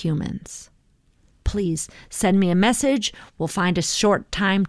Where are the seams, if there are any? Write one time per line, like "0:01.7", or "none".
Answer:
0:01.4